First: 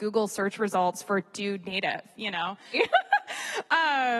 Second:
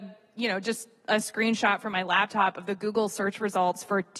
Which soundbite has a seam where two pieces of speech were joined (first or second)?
first